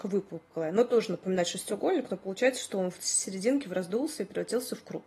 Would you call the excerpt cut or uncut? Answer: uncut